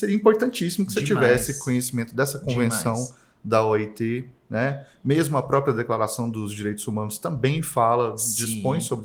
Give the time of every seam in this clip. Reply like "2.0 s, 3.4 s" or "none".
none